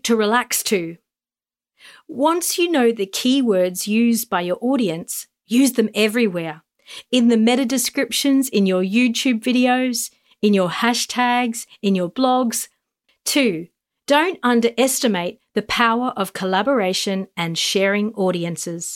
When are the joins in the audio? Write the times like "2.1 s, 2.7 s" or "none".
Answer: 13.1 s